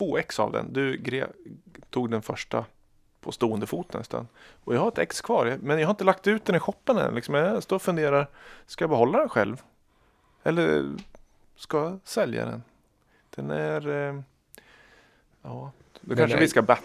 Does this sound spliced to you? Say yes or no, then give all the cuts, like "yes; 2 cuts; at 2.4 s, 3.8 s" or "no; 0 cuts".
no; 0 cuts